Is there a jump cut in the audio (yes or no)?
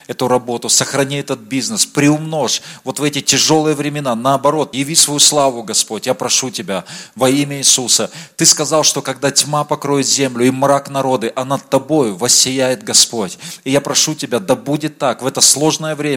yes